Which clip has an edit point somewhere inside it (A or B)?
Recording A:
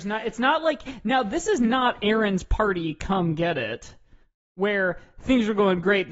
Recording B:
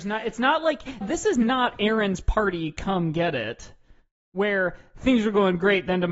B